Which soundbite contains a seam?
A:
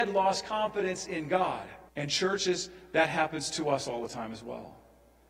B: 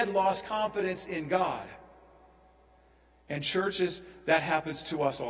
A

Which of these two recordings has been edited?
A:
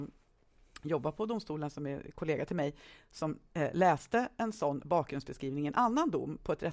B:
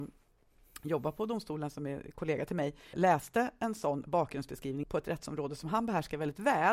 B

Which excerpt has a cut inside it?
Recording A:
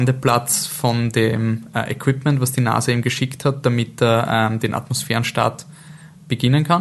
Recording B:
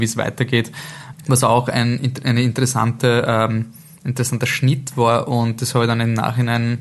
B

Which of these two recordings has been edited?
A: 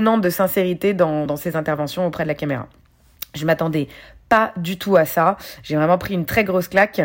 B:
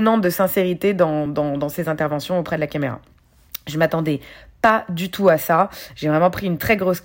A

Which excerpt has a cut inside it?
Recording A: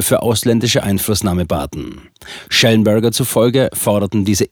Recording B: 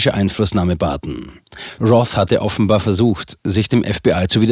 B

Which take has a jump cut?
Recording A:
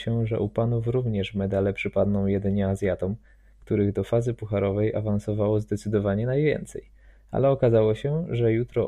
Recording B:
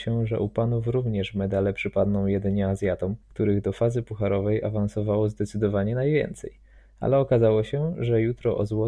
B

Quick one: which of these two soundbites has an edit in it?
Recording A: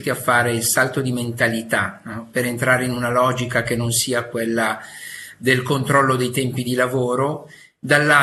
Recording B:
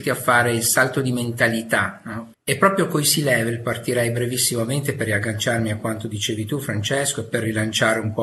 B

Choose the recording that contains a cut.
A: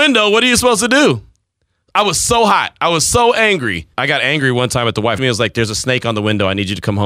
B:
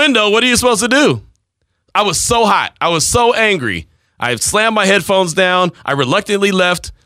A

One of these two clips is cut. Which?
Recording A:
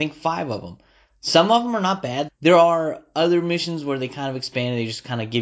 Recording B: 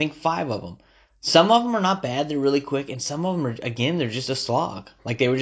A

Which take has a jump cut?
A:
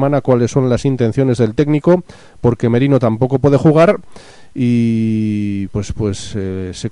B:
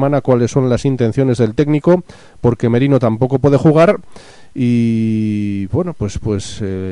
A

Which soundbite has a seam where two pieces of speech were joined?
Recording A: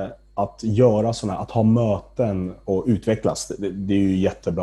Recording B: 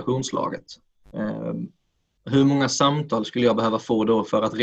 B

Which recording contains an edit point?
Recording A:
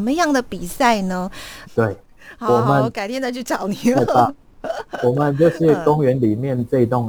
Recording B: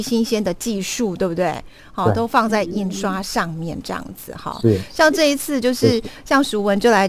A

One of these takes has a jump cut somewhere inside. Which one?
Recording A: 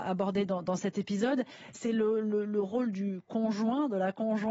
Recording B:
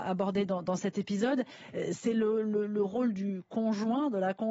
A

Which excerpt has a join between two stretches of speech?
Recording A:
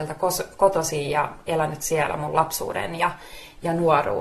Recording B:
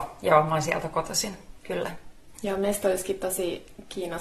B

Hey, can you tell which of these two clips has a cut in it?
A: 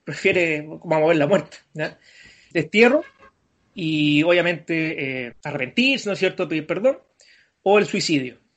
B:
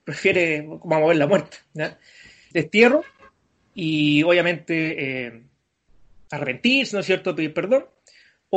A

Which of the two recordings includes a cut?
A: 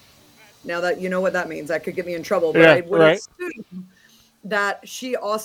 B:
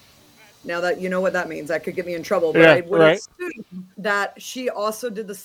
B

